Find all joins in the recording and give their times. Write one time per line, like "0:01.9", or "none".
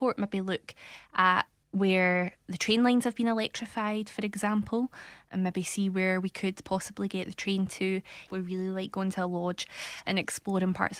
0:08.3